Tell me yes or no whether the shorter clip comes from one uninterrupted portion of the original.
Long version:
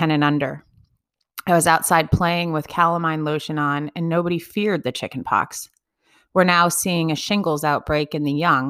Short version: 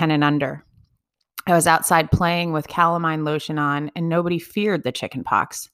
yes